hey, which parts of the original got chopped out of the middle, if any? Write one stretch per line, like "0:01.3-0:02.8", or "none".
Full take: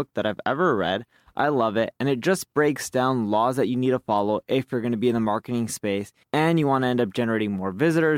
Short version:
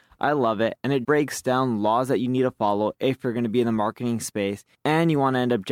0:02.2-0:02.5